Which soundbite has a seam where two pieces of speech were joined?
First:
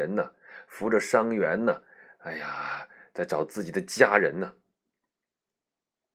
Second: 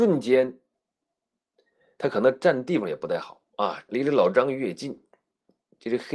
second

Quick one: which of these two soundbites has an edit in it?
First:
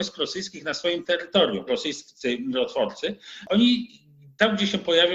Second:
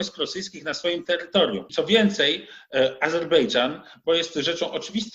first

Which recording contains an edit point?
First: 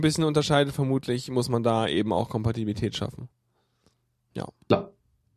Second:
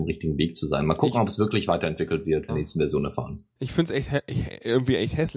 second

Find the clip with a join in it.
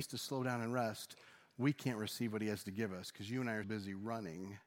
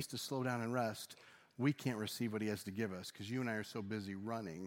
first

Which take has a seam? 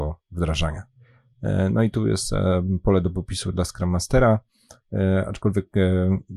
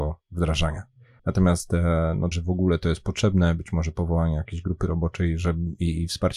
second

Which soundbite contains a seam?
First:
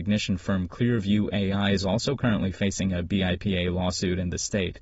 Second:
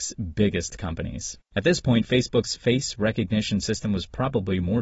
second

